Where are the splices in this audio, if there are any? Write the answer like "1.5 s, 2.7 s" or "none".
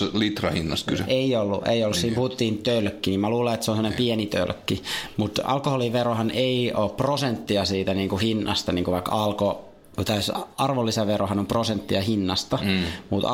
none